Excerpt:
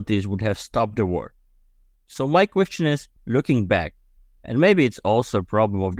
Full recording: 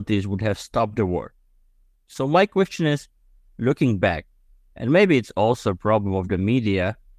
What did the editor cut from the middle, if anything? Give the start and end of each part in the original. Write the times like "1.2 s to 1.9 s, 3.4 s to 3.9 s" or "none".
3.2 s to 3.5 s